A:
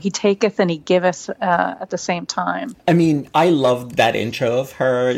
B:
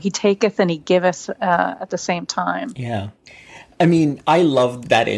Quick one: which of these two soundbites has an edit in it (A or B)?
A